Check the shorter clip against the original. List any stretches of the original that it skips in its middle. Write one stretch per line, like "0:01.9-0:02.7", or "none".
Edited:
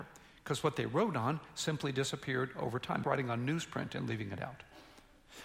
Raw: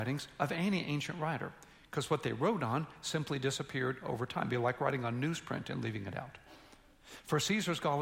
0:04.5-0:04.8

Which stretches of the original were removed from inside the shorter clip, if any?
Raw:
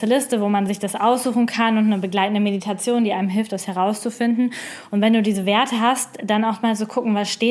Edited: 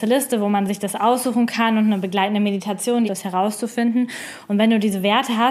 0:03.1-0:03.5

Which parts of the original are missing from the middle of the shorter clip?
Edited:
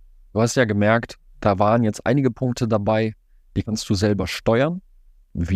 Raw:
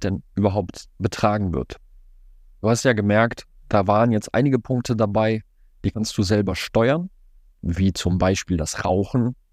none

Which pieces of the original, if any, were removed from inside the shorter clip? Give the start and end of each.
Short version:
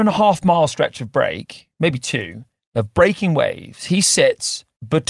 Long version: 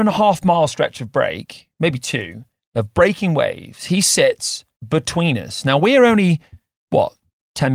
none

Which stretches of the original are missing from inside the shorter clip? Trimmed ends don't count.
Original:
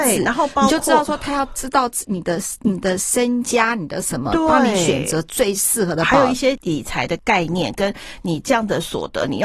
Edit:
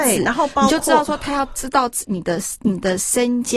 none

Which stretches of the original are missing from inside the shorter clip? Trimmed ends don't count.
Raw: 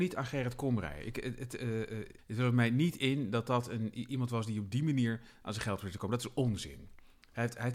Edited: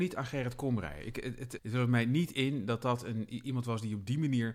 0:01.6-0:02.2

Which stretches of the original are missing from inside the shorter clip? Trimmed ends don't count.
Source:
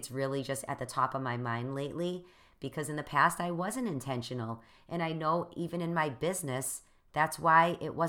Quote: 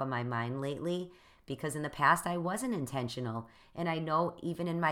none

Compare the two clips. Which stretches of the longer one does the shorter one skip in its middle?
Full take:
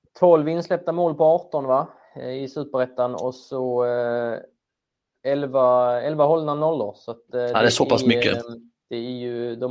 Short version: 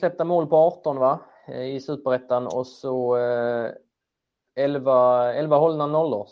none

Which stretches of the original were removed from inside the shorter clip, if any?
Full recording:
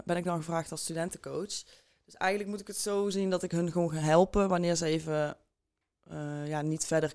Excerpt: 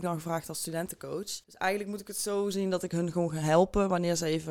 0:01.7-0:02.0

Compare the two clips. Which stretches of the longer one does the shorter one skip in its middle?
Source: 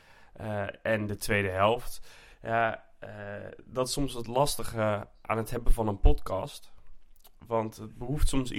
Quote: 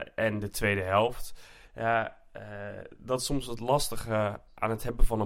none

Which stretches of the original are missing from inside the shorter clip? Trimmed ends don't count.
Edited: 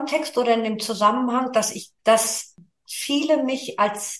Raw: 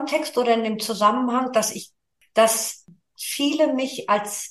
0:02.0-0:02.3

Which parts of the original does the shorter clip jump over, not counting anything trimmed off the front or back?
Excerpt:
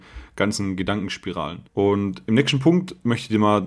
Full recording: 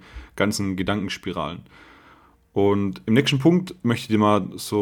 0:01.7-0:02.5

